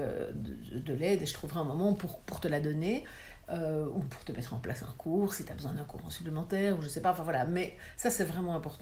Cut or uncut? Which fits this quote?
uncut